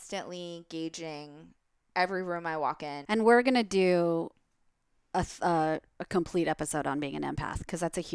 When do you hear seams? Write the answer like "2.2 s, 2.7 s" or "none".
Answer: 3.0 s